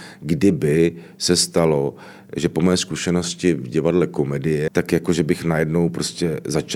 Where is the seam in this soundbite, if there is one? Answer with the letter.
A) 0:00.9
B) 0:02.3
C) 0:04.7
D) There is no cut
C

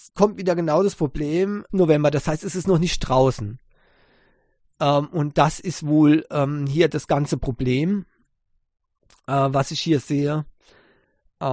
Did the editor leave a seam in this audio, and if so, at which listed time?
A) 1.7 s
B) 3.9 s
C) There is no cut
A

